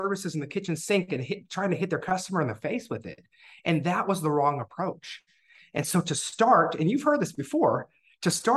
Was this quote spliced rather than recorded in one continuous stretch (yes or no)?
no